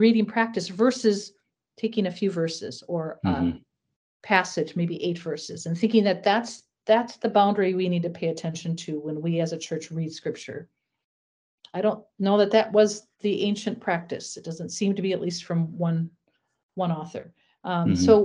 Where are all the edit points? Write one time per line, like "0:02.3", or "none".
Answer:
none